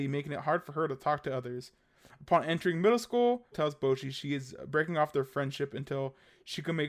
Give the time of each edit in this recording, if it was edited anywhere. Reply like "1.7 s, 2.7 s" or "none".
3.5 s